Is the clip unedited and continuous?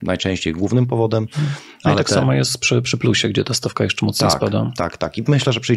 yes; 0 cuts

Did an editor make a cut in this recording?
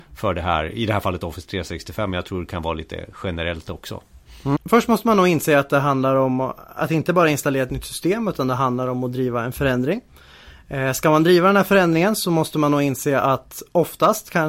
yes; 1 cut; at 4.6 s

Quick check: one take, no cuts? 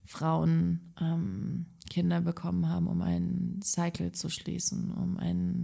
yes; 0 cuts

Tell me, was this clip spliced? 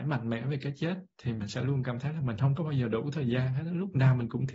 no; 0 cuts

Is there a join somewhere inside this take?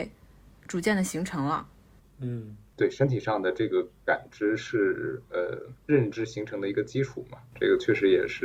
yes; 2 cuts; at 2.0 s, 5.8 s

